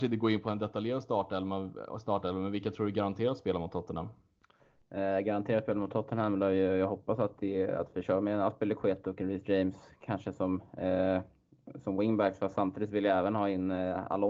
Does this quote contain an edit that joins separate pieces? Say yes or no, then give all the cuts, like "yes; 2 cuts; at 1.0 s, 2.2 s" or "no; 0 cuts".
no; 0 cuts